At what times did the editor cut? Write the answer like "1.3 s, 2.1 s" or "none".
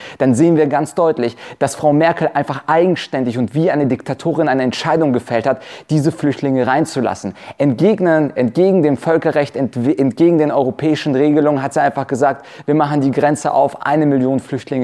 none

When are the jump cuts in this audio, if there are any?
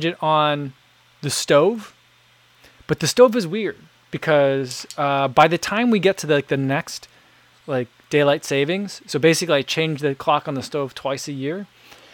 none

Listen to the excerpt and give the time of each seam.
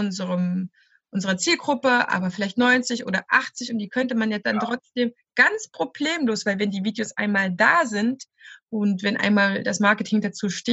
none

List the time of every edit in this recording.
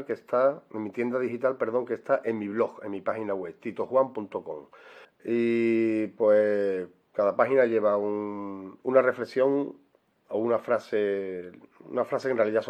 5.0 s

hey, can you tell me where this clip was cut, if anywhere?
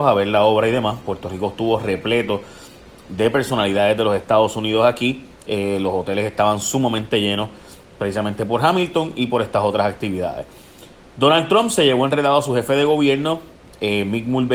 none

